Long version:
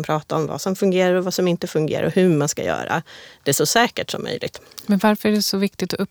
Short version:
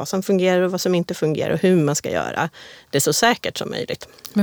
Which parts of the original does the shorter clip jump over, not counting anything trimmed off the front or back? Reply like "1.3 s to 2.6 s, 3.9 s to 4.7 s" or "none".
none